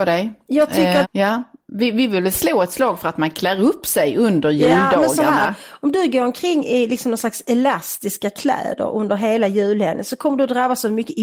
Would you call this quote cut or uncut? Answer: cut